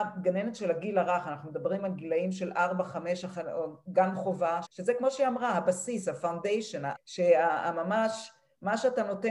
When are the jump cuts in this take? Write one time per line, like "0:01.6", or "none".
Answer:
0:04.6
0:06.9